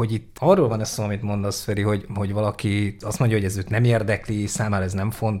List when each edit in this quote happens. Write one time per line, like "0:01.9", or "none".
none